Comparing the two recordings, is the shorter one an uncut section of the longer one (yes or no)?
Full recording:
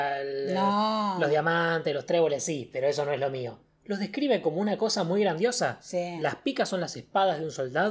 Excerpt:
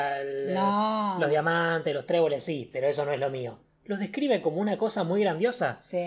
yes